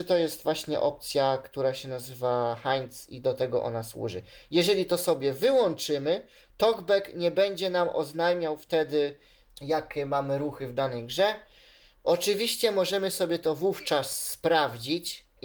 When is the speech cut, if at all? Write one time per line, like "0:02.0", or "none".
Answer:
none